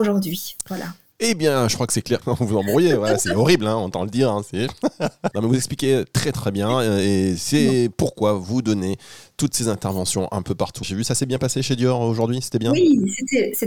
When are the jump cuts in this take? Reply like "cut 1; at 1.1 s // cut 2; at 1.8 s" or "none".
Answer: cut 1; at 2.2 s // cut 2; at 5.3 s // cut 3; at 10.8 s